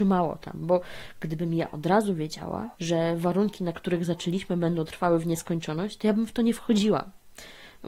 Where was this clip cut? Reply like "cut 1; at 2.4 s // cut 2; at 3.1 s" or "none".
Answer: cut 1; at 2.7 s